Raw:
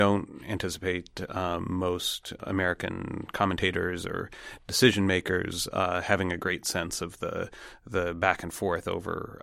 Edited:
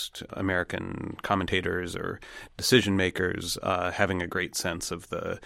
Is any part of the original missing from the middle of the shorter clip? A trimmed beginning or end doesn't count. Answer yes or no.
no